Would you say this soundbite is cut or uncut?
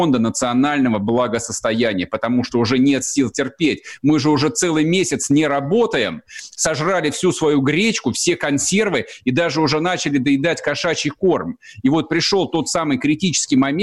uncut